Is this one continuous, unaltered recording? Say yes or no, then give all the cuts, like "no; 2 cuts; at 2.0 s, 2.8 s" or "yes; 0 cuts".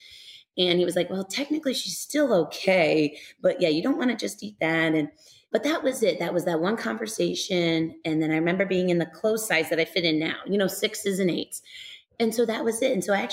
yes; 0 cuts